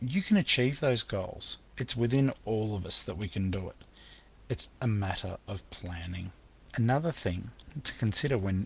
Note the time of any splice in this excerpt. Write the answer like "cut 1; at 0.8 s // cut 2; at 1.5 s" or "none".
cut 1; at 4.7 s